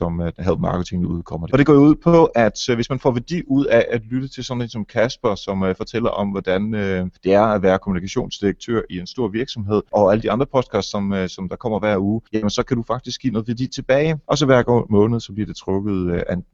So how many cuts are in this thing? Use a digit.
2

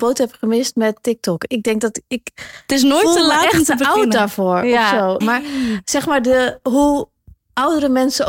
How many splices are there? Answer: 1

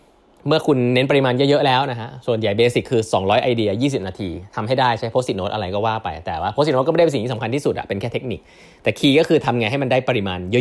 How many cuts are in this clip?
0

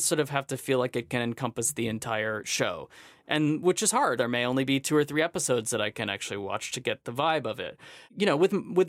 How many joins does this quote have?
1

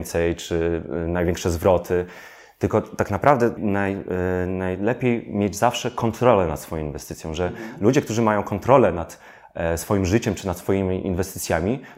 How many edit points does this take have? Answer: 1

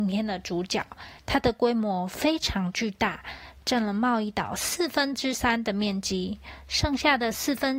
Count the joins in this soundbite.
1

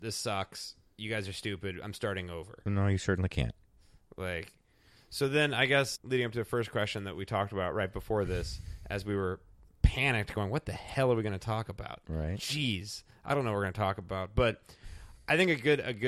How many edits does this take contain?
1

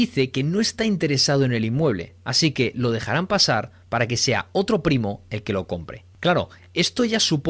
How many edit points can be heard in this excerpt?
0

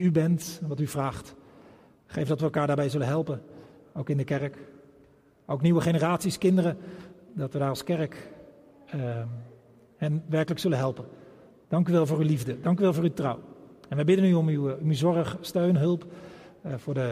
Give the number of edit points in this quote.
1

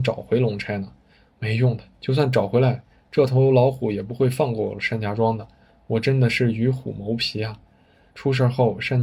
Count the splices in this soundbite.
1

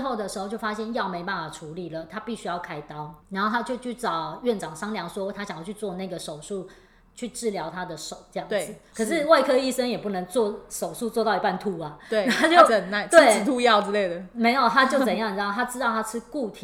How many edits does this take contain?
3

